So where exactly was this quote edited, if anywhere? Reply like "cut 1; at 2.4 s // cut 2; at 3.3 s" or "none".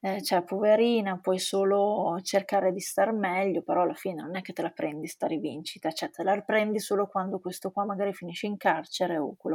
none

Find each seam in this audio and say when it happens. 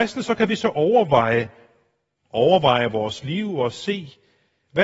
cut 1; at 2.2 s

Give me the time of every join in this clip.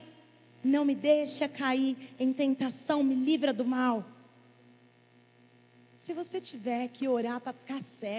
none

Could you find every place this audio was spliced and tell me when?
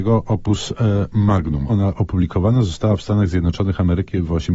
cut 1; at 1.7 s

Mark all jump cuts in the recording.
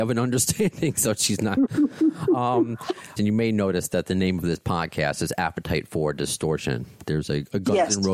cut 1; at 3.2 s

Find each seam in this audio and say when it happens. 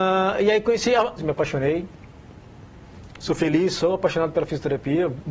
cut 1; at 1.2 s

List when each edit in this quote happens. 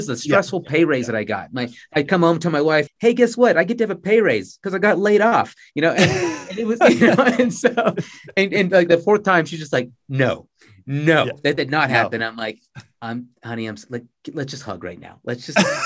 cut 1; at 2.9 s

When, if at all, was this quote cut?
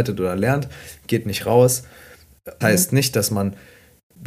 cut 1; at 2.6 s

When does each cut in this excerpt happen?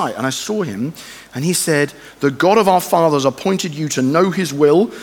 none

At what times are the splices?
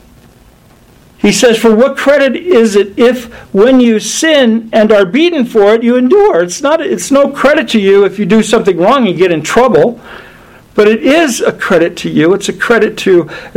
none

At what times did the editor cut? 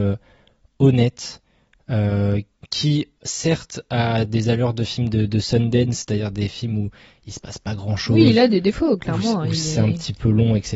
cut 1; at 3.2 s

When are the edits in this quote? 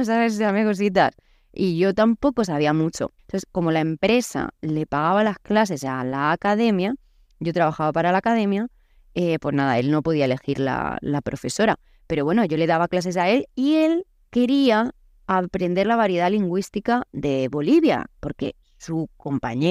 cut 1; at 3.2 s

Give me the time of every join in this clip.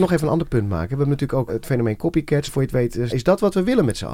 cut 1; at 1.5 s // cut 2; at 3.1 s

